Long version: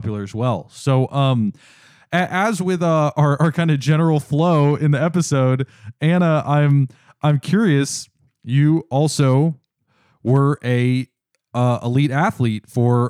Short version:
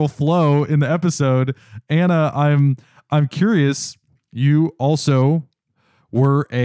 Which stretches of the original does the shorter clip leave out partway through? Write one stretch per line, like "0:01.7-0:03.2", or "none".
none